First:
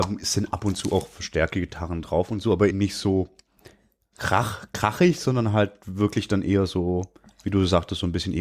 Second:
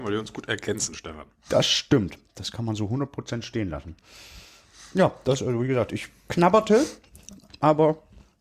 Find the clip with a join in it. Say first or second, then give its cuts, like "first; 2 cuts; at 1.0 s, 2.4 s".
first; 1 cut; at 2.7 s